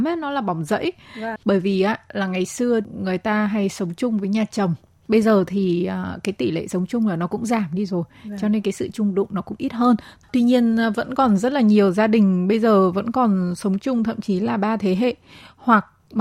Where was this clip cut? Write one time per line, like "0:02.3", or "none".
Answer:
0:01.4